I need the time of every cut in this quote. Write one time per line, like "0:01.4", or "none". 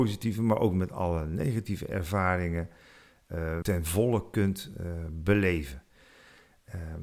0:03.6